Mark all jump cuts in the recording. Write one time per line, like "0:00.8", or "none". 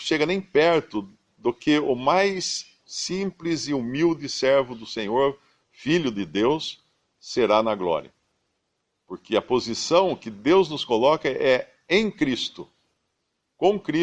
none